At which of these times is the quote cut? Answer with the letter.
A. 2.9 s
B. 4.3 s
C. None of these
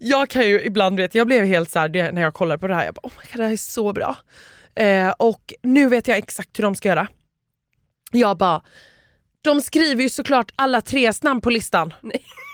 C